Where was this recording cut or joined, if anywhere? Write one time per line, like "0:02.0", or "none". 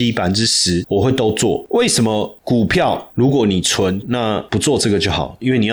0:04.0